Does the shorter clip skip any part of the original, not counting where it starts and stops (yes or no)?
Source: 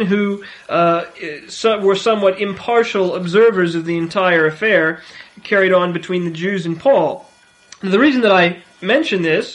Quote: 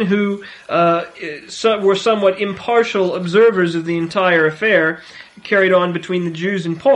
no